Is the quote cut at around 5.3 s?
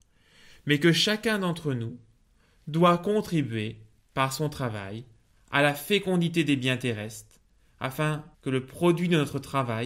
yes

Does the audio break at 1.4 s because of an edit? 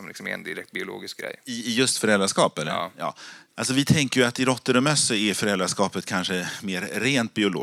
no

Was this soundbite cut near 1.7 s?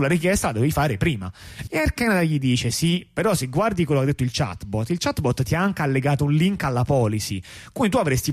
yes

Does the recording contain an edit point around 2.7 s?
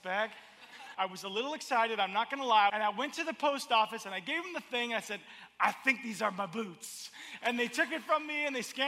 yes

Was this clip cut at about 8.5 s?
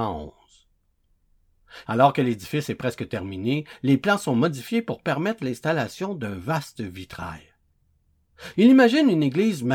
yes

